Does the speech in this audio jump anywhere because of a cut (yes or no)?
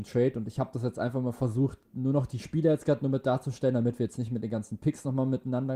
no